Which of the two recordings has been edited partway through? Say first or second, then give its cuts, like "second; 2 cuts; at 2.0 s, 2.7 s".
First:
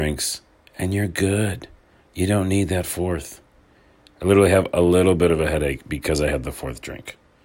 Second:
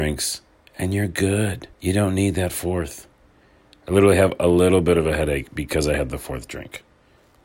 second; 1 cut; at 1.7 s